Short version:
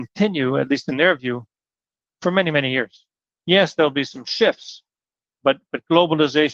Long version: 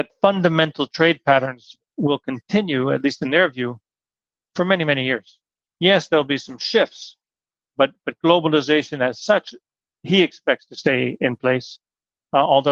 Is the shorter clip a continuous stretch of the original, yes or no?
yes